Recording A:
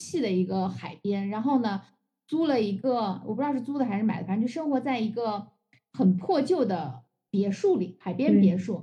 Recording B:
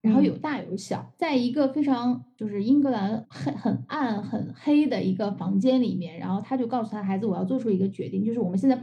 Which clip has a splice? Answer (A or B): B